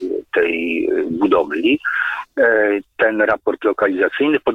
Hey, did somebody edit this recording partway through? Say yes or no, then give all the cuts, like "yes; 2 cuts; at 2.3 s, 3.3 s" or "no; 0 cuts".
no; 0 cuts